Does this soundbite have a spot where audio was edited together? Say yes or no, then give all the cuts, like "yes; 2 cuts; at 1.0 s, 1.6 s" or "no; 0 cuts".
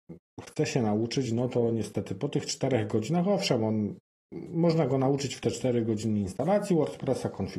no; 0 cuts